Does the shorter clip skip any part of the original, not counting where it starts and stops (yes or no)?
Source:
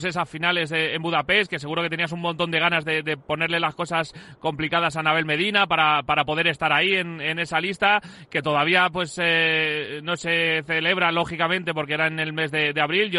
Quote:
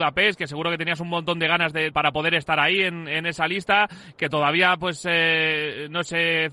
yes